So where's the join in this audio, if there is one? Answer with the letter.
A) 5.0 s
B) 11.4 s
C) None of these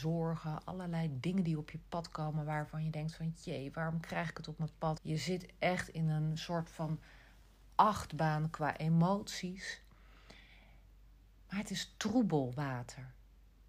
A